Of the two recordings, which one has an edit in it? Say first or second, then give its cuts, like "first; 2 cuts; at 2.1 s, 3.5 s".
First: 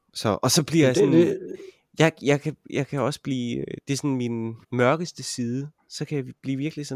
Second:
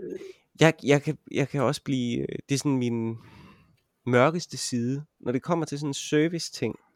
first; 2 cuts; at 4.6 s, 5.8 s